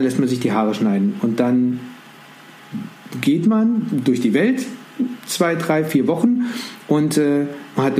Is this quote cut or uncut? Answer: uncut